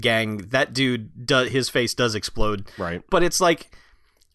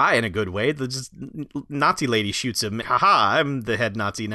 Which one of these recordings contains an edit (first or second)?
second